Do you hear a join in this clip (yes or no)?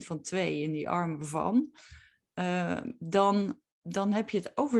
yes